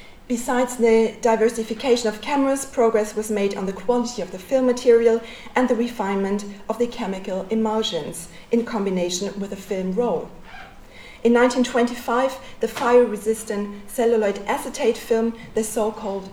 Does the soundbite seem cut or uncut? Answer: uncut